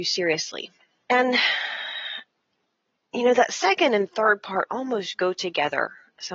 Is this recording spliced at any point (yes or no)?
yes